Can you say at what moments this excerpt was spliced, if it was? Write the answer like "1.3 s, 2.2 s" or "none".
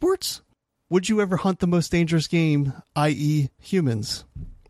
3.6 s